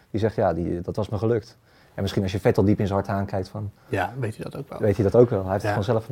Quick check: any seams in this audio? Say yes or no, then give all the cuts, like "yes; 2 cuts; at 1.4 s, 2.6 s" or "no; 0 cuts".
no; 0 cuts